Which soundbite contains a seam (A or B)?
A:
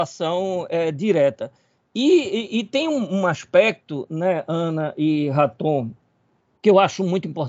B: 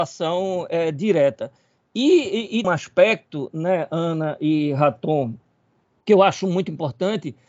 B